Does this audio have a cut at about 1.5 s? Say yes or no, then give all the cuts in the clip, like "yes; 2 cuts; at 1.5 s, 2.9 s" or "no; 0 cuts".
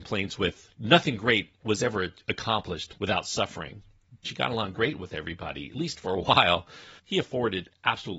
no; 2 cuts; at 4.2 s, 7.0 s